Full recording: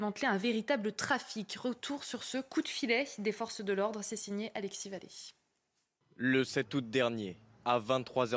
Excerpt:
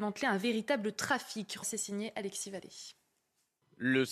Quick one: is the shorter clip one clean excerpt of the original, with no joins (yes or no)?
no